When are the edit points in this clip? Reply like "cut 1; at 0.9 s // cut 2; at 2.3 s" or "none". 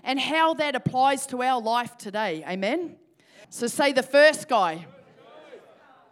cut 1; at 3.4 s

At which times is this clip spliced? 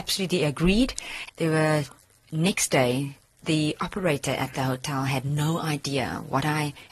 cut 1; at 1.3 s

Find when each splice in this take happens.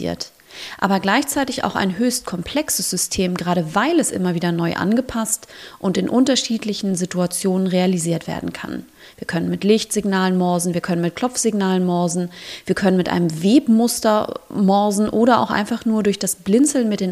none

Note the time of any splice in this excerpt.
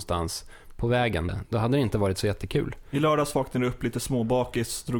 cut 1; at 1.3 s

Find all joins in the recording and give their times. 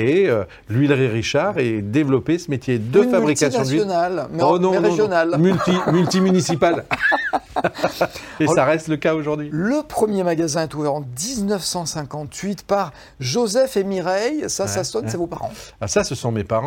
none

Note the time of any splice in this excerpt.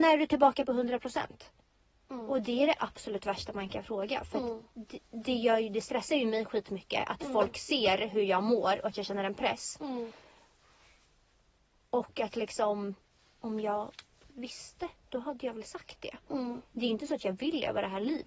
none

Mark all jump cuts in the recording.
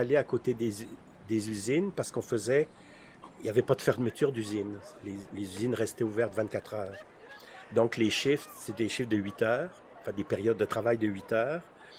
none

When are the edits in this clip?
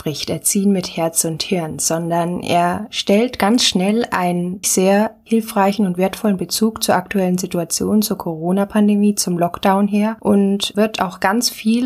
cut 1; at 4.6 s

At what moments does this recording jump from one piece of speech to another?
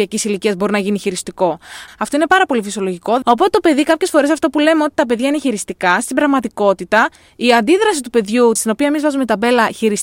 cut 1; at 1.9 s // cut 2; at 3.2 s // cut 3; at 8.6 s

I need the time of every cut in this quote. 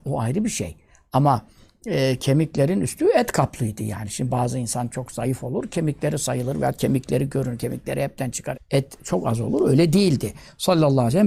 cut 1; at 8.5 s

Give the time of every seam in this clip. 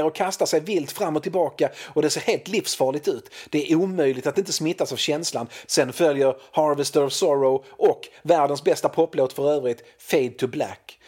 cut 1; at 5.6 s

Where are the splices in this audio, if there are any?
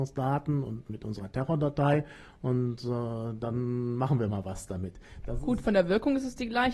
none

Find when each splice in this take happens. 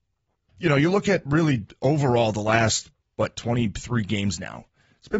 none

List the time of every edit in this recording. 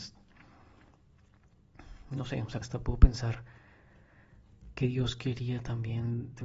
cut 1; at 2.6 s

